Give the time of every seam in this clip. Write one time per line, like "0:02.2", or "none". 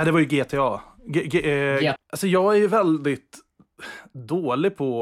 0:02.0